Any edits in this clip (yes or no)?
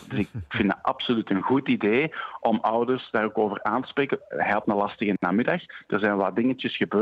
no